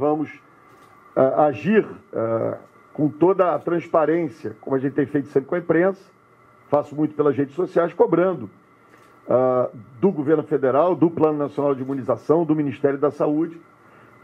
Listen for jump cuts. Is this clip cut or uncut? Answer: uncut